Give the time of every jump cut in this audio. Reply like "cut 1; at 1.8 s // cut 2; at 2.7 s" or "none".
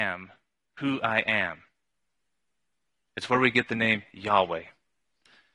none

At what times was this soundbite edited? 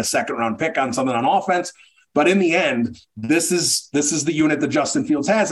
none

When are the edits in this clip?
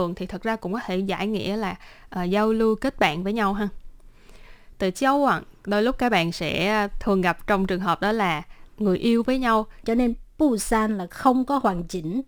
cut 1; at 4.7 s // cut 2; at 9.8 s

